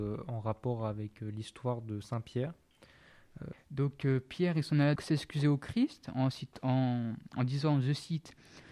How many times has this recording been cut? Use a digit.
2